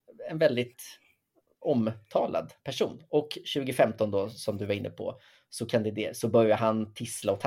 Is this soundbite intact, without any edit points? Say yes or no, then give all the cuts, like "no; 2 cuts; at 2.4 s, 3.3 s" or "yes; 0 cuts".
yes; 0 cuts